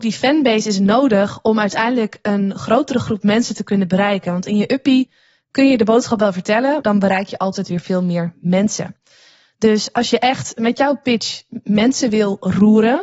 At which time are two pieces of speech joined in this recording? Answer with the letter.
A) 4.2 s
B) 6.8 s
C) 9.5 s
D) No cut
B